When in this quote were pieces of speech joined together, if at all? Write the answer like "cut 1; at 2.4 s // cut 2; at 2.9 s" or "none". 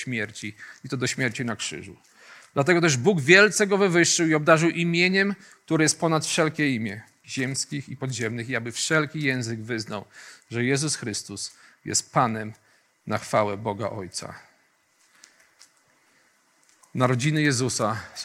cut 1; at 7.2 s

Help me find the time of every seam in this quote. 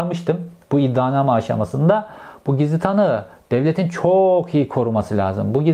none

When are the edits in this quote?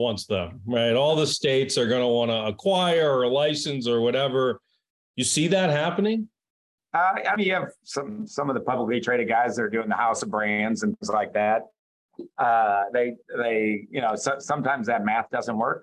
none

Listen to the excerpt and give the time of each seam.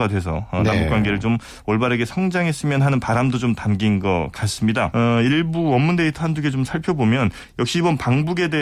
cut 1; at 4.9 s

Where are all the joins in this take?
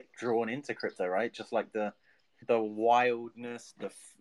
cut 1; at 2.4 s

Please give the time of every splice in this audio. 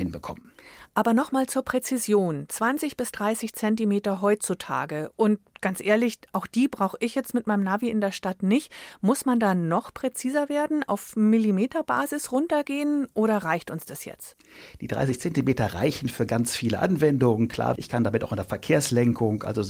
cut 1; at 17.8 s

